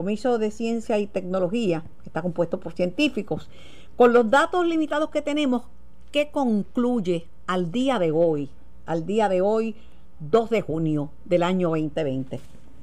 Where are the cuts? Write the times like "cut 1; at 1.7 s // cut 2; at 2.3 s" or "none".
none